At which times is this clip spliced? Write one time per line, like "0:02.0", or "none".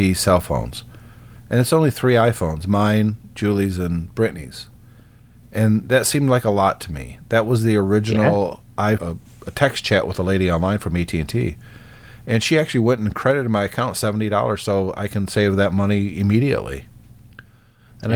0:09.0

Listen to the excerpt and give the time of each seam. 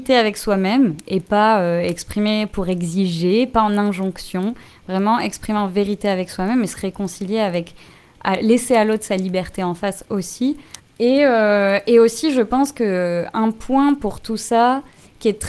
0:10.8

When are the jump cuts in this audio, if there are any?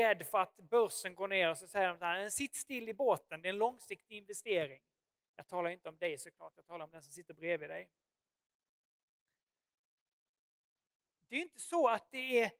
0:05.3

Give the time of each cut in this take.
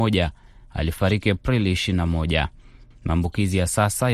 0:02.9

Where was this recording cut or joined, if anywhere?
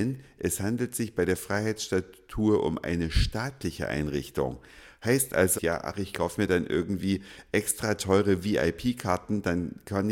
0:05.6

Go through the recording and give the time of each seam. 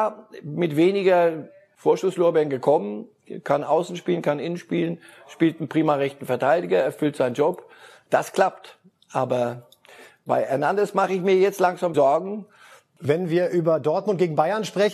0:11.9

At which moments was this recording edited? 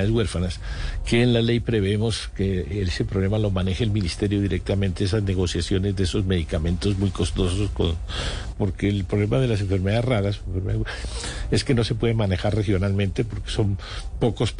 0:08.5

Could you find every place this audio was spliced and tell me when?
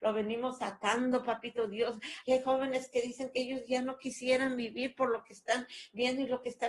0:02.2

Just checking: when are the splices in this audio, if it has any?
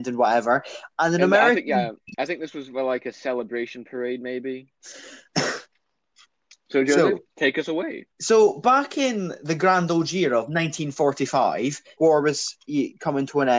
0:04.8
0:08.1
0:12.0

